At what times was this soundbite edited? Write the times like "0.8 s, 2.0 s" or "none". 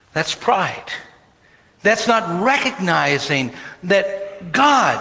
none